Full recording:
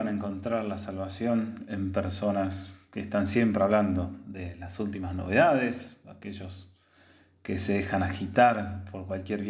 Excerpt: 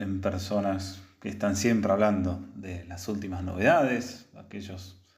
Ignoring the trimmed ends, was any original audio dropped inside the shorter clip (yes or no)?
no